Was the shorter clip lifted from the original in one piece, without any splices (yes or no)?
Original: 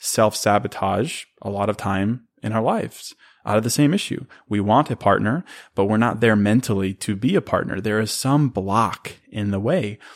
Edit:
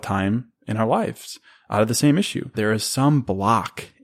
no